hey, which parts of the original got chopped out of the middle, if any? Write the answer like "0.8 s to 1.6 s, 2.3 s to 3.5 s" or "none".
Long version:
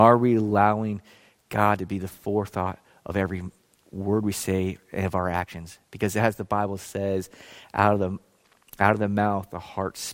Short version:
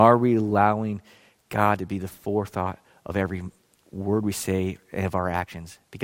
none

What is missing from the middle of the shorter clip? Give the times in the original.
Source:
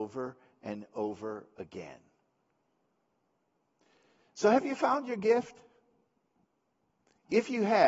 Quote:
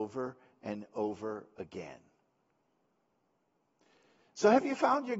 none

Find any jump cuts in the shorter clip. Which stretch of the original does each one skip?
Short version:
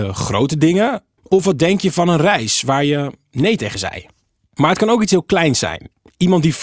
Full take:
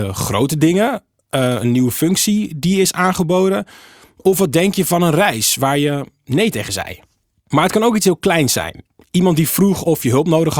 1.2 s to 4.1 s

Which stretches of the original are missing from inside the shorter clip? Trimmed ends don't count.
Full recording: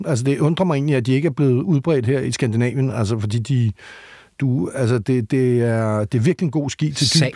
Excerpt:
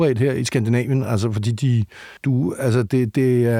4.0 s to 4.3 s

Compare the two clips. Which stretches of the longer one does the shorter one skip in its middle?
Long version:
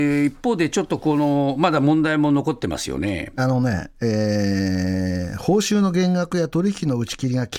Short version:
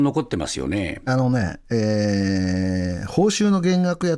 none

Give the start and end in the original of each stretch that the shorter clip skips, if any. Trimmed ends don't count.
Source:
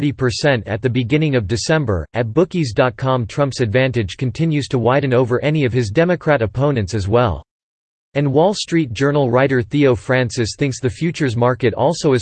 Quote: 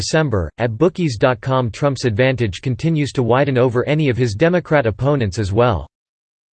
none

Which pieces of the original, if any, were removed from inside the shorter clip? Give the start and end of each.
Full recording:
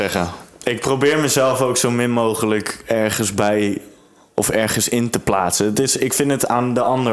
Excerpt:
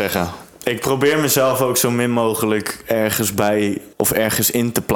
3.9 s to 4.3 s

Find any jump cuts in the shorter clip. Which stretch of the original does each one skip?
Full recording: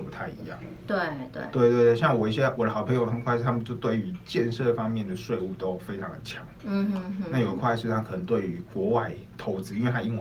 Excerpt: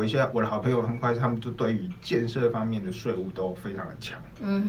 none

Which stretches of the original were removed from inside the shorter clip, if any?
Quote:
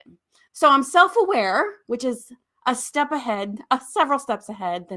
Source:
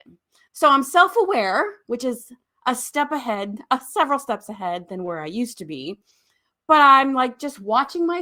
none

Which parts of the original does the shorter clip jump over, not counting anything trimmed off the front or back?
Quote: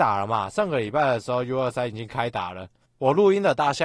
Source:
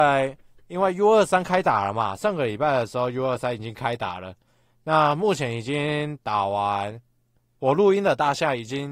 4.5 s to 7.5 s

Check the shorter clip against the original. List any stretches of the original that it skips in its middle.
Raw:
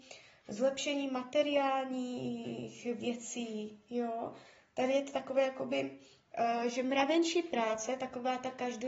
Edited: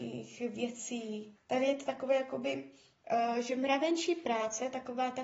3.8 s to 4.6 s

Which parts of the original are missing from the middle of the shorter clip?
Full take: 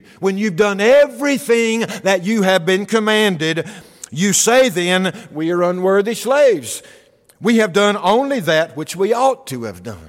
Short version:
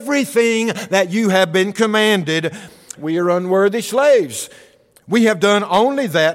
4.1 s to 5.3 s

